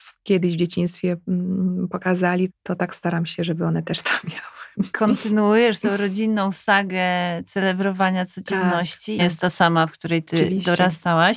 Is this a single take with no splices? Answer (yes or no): no